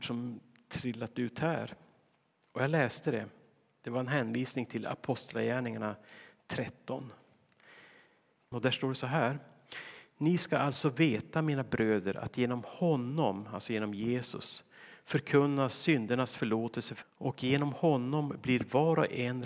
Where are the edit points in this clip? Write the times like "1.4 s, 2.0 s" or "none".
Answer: 8.5 s, 17.0 s